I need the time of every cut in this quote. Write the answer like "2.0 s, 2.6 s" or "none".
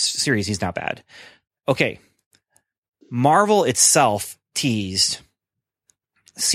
none